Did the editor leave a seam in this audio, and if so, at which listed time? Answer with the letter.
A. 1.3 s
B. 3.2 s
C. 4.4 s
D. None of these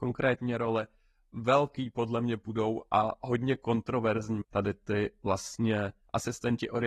C